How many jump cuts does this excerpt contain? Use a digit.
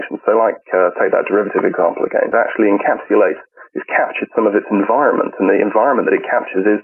1